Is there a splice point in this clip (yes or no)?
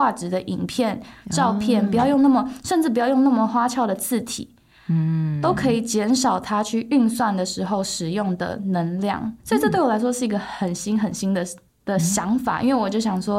no